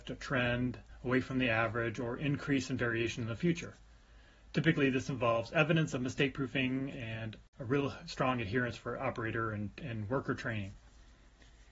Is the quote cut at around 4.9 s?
no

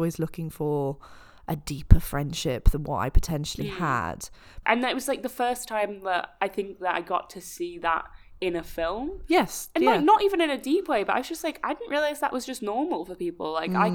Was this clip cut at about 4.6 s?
yes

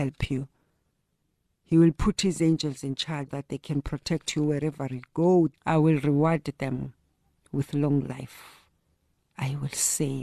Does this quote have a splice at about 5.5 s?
yes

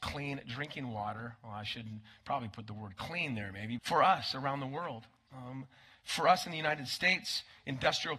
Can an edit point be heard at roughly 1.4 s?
no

